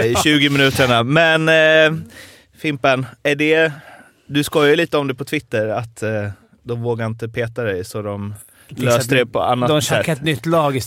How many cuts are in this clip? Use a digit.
0